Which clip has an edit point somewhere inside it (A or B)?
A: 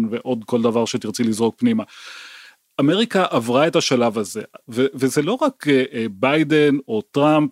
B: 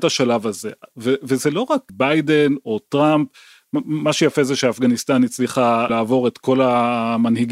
B